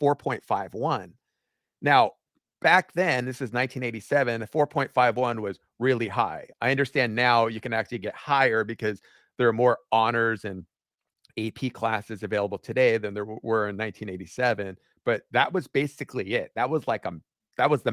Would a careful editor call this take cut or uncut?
uncut